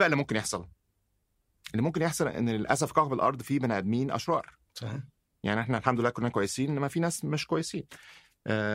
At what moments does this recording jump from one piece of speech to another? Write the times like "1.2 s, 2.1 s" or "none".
none